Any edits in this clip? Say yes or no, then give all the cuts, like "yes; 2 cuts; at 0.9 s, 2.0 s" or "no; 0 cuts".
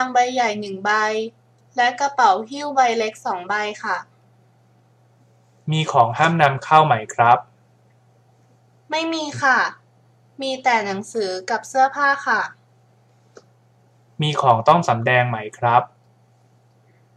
no; 0 cuts